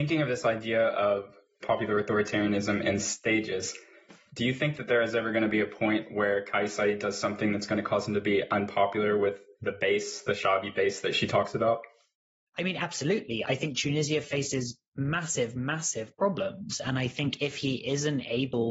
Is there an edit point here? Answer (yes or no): no